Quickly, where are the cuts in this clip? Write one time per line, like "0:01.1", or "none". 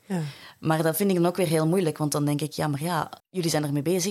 0:03.2

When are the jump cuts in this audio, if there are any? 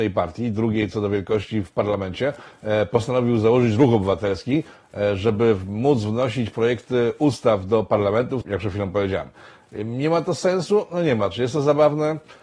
0:08.4

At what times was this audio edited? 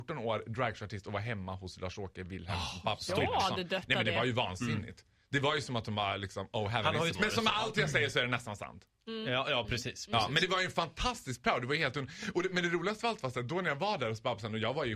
0:07.2

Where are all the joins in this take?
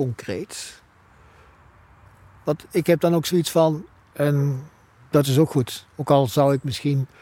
0:04.1

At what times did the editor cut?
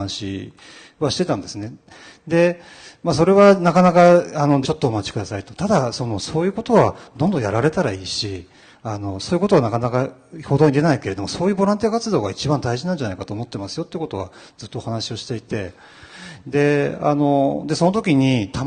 0:04.6

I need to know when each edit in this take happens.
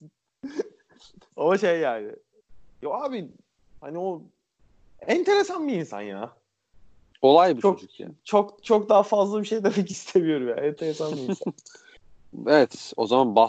none

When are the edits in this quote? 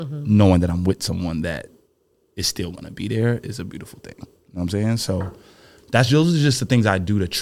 none

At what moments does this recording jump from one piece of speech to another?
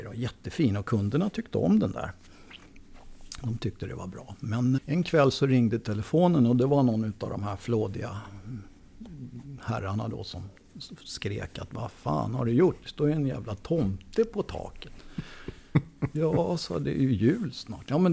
0:04.8

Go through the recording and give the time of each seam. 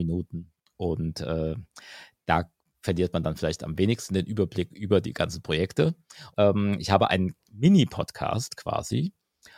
0:06.3

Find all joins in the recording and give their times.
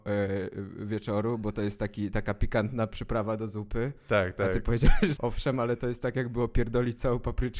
0:05.2

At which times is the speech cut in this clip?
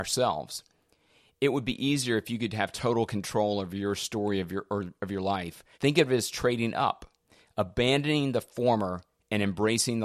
0:05.7

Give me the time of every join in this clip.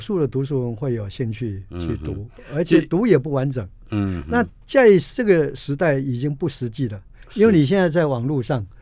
none

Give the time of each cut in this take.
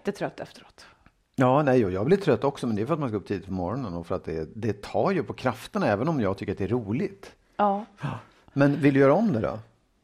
none

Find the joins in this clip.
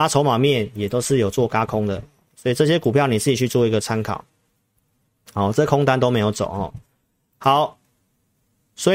none

